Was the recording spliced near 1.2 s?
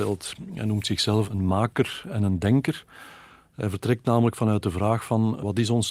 yes; 1 cut; at 1.2 s

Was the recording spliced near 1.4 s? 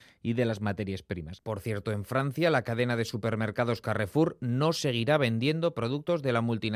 yes; 1 cut; at 1.4 s

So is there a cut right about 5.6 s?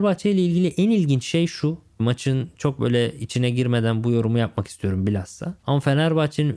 yes; 1 cut; at 5.6 s

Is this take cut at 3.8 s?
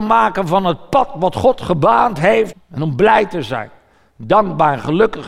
no; 1 cut; at 2.5 s

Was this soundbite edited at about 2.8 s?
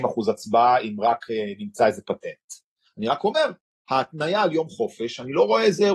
yes; 1 cut; at 2.8 s

